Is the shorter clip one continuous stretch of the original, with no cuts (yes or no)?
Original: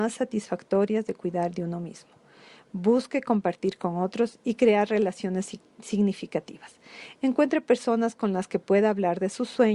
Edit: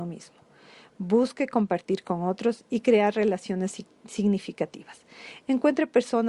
yes